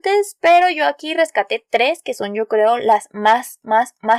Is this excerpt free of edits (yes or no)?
yes